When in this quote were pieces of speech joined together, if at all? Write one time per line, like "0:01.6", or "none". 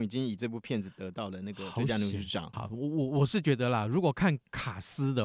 0:02.5